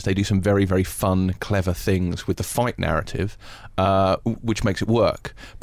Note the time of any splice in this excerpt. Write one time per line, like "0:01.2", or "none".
none